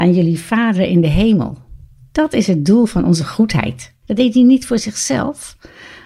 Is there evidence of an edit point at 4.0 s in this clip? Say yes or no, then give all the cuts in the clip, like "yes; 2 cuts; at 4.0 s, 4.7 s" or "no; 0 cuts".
yes; 1 cut; at 4.0 s